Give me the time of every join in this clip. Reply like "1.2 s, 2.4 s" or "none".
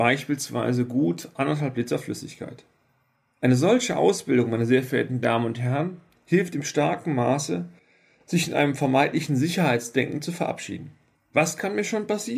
none